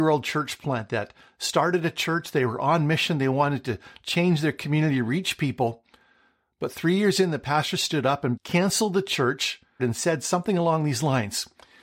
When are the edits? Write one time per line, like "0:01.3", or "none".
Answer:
0:08.4
0:09.8